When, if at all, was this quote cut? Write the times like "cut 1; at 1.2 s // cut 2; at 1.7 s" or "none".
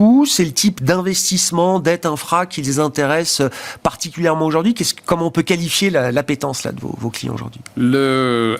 none

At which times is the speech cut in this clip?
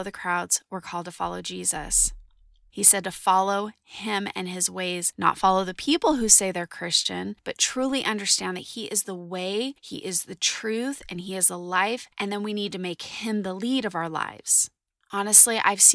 none

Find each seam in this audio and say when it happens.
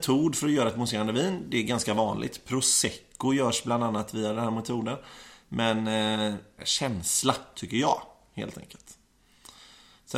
cut 1; at 6.6 s

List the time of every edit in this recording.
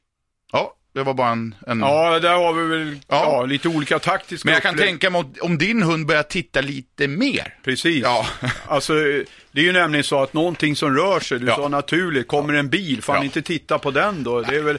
none

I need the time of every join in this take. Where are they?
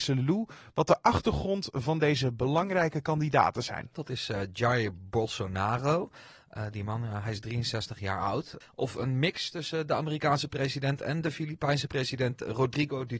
cut 1; at 3.9 s // cut 2; at 8.6 s

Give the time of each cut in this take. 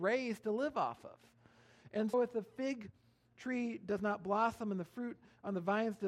cut 1; at 2.1 s

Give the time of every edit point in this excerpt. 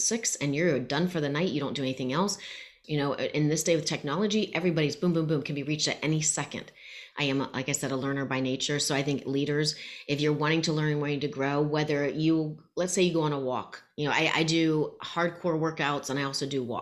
cut 1; at 2.8 s // cut 2; at 7.1 s

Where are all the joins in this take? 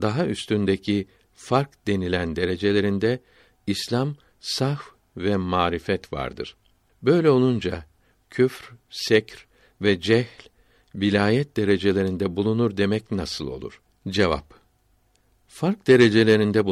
none

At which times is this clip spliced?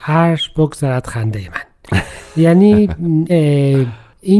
cut 1; at 3.3 s

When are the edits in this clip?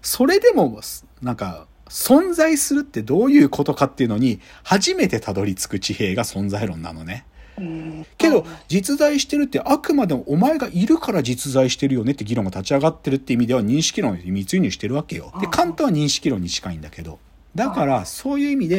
cut 1; at 8.0 s // cut 2; at 15.3 s

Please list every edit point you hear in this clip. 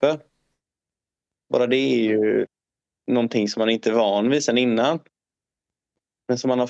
none

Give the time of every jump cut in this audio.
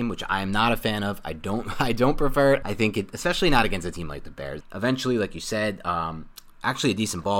cut 1; at 2.6 s // cut 2; at 4.6 s

